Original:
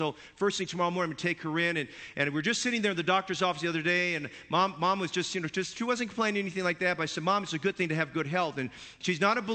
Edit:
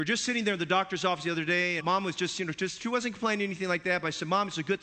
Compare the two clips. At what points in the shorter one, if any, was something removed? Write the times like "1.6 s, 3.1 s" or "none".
1.8 s